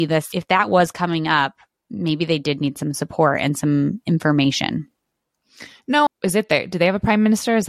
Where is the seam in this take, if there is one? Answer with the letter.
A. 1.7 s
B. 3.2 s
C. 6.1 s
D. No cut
C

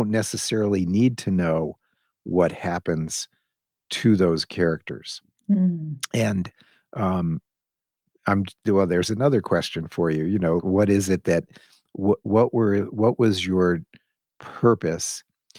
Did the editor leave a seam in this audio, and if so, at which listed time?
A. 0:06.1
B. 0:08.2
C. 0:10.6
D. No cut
C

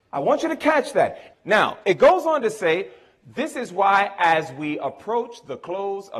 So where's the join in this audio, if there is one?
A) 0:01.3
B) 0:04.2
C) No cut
A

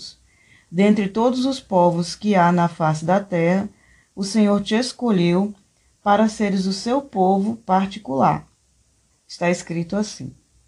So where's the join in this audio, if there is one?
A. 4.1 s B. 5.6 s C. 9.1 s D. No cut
C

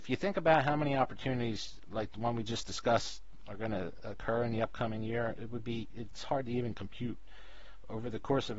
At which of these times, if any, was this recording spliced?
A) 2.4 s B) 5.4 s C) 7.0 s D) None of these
B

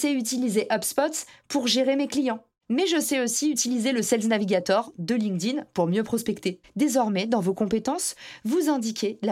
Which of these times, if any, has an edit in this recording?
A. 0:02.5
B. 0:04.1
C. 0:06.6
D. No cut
C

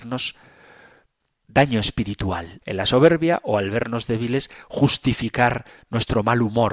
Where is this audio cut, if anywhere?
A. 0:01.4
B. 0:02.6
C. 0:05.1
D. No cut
B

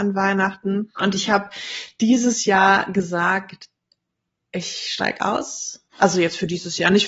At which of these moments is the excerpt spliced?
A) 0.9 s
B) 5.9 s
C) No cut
B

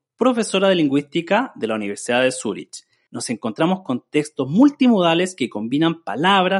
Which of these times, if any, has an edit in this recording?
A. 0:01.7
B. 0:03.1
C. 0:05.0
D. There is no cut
B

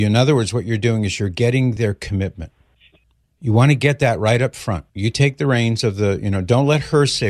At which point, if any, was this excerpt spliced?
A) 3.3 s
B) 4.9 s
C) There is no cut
B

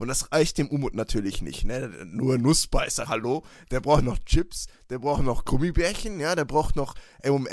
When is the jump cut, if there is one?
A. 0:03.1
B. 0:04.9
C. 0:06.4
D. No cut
A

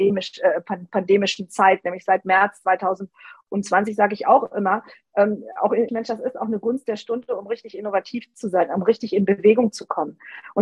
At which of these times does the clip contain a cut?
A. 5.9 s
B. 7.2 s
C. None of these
A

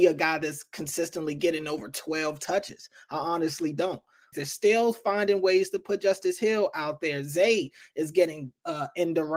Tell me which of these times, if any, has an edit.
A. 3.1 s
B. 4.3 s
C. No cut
B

